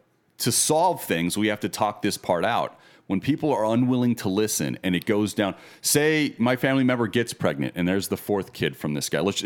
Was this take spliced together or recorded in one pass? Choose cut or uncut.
uncut